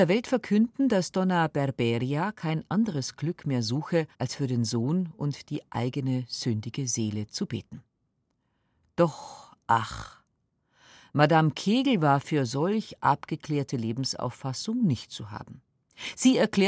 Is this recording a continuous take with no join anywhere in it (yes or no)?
no